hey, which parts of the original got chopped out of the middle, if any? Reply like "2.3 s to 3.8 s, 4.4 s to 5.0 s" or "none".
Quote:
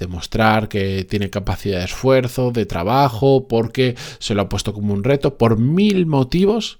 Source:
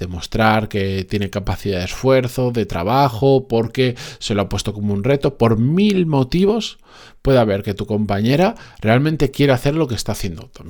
none